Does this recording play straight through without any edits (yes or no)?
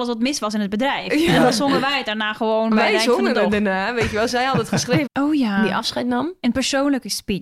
no